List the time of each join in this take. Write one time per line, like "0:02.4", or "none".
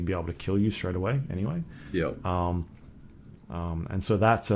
0:03.4